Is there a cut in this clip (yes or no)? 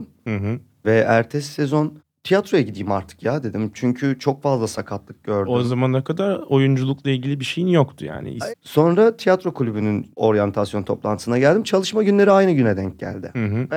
yes